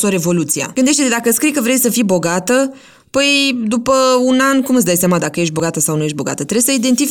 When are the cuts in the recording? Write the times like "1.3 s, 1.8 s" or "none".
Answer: none